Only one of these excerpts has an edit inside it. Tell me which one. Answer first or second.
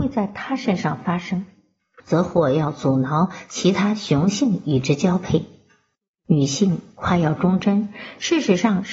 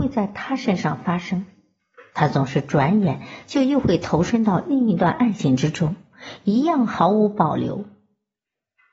first